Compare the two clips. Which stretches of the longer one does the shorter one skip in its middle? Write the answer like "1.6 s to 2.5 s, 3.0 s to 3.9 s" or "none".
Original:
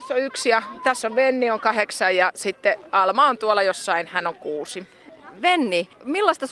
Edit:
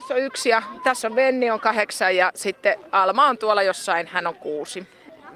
none